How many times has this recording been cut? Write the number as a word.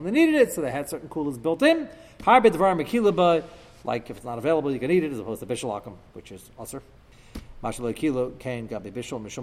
zero